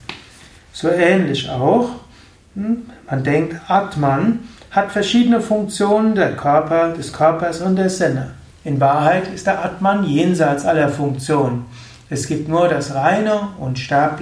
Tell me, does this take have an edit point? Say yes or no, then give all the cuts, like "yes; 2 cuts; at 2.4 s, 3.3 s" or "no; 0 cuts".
no; 0 cuts